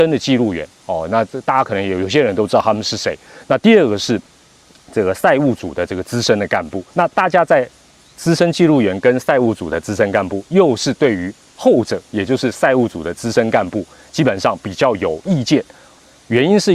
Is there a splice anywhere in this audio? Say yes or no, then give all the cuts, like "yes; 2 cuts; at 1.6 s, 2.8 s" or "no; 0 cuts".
yes; 1 cut; at 6.9 s